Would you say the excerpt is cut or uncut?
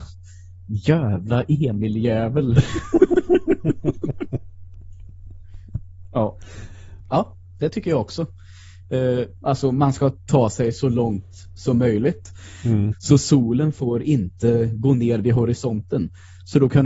cut